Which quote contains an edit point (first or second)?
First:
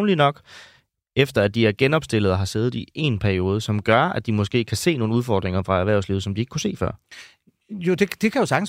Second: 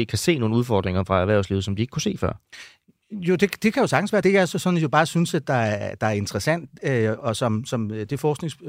second